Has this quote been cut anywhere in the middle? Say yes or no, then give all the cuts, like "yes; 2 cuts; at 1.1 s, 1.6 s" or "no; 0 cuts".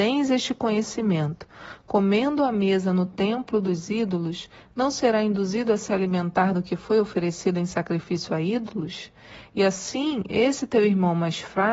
no; 0 cuts